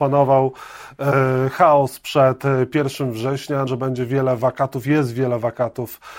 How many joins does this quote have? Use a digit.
1